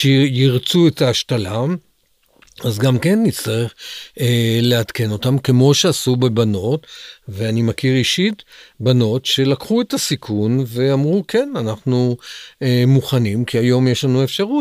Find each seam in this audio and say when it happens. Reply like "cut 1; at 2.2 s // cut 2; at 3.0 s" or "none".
none